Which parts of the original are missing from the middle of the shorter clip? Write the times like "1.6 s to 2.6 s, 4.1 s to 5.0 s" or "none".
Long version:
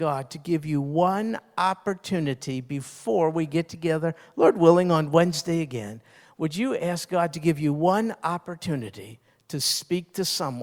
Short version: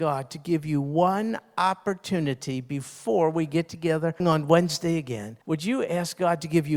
4.2 s to 4.8 s, 6.1 s to 6.3 s